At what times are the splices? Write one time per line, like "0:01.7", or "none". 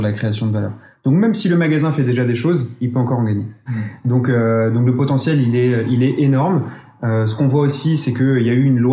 0:03.7